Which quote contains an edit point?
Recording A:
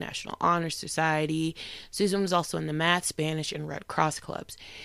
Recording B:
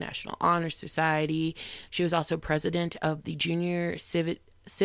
B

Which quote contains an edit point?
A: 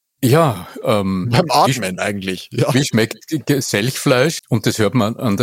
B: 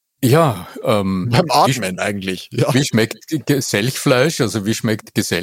A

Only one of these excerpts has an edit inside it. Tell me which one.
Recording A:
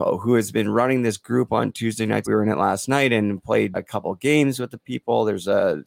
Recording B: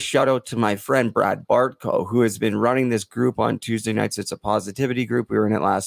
A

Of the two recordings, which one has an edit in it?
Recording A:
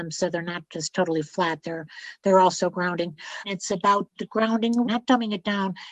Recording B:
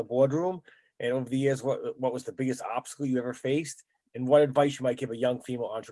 A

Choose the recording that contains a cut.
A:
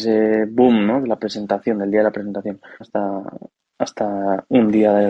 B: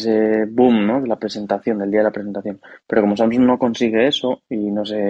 A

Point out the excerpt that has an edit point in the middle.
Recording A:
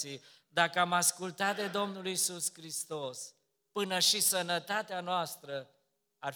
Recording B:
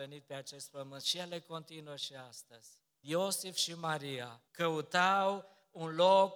B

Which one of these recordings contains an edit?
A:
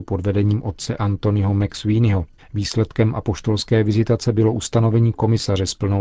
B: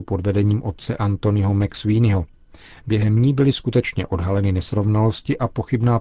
A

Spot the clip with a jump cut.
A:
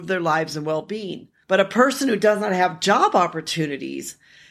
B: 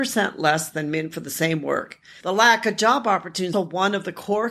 B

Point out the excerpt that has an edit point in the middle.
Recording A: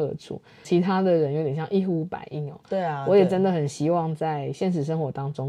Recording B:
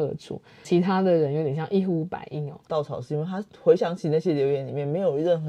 B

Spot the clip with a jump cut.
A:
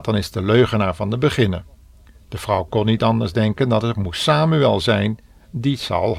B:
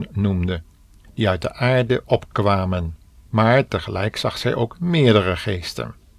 B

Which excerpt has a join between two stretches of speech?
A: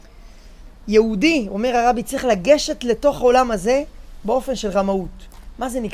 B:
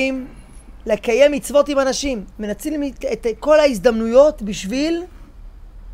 B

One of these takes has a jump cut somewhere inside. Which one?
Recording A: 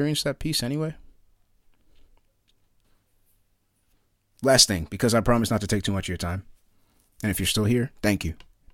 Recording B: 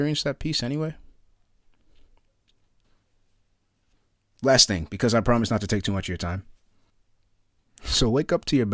B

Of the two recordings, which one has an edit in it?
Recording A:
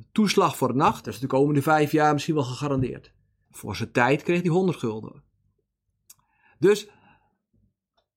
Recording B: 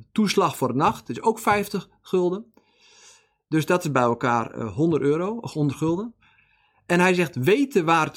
A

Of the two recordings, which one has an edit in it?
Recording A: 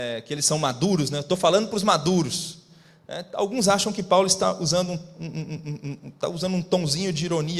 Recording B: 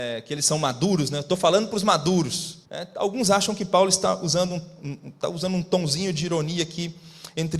B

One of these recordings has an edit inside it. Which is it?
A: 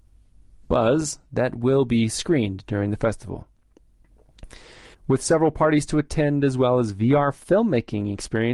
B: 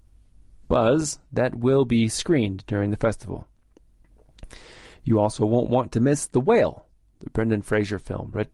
A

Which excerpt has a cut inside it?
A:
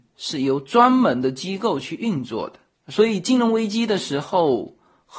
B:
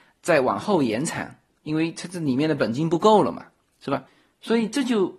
B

